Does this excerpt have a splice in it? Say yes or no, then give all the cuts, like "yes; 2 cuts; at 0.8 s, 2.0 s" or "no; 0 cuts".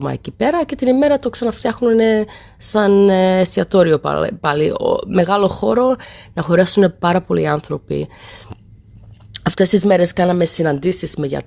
no; 0 cuts